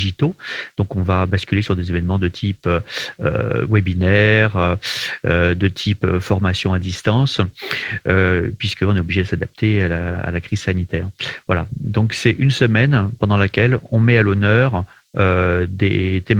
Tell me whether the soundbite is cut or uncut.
uncut